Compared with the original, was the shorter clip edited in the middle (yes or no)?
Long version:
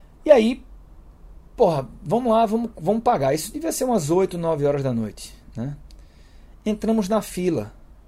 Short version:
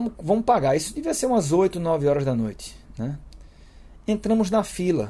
no